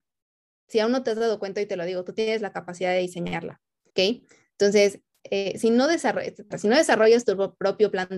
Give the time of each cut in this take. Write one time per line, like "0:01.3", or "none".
0:03.9
0:06.5

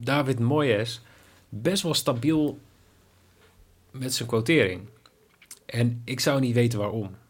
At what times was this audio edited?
none

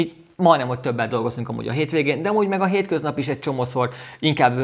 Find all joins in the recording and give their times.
none

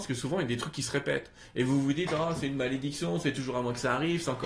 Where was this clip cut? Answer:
none

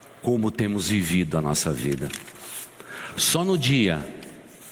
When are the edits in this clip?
none

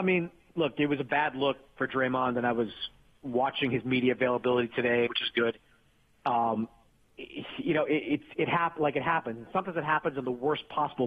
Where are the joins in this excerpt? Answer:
0:05.1

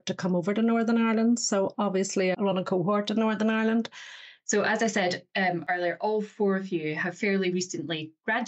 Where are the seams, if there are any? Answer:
0:02.3
0:04.4

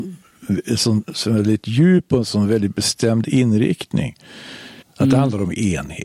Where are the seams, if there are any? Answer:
0:04.8

